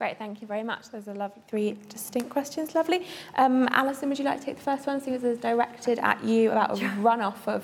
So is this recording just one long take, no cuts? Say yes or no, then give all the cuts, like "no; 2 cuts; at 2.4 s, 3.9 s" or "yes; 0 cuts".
yes; 0 cuts